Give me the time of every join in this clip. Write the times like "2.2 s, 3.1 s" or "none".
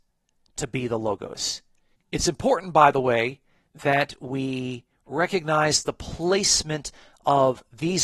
2.0 s

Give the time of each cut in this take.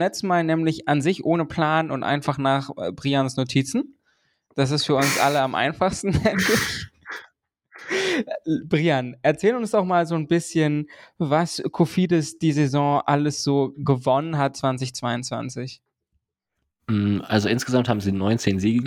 none

